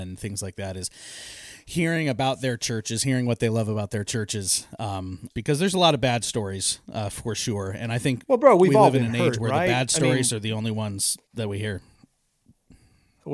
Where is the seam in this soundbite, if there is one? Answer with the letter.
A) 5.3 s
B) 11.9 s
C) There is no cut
A